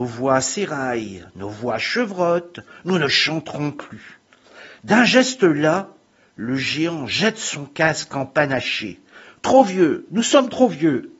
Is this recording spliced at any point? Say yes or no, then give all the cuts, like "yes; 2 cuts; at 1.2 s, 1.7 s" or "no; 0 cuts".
no; 0 cuts